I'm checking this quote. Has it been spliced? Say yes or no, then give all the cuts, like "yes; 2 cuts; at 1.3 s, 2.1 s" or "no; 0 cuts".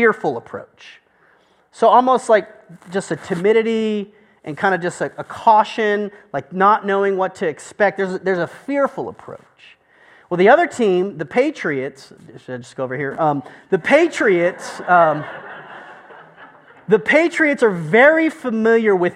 no; 0 cuts